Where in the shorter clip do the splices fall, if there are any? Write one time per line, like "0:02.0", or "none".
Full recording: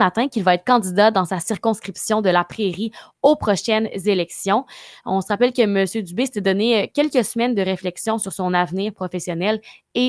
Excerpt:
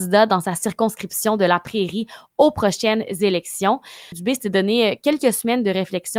0:04.1